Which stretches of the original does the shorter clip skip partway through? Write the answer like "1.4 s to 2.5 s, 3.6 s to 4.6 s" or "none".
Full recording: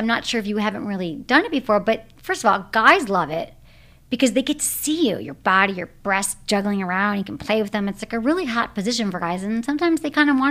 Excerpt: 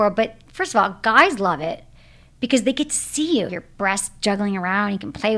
5.2 s to 5.7 s